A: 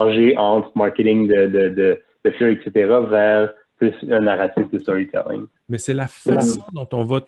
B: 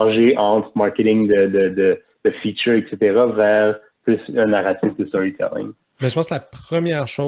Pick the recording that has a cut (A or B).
A